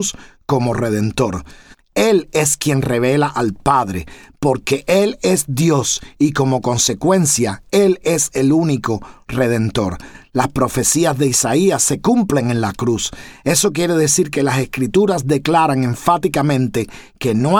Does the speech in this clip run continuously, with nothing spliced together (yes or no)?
no